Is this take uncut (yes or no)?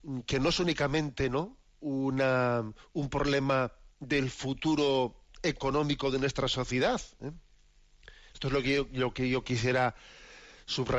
yes